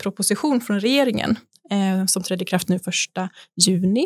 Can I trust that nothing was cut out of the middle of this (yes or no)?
yes